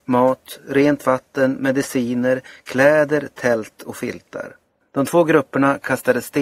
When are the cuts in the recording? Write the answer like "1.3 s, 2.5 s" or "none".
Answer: 4.8 s